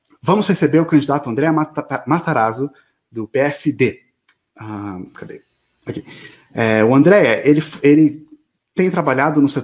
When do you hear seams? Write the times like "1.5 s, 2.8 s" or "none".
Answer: 4.5 s